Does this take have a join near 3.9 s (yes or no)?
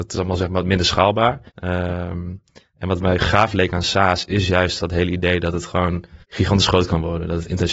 no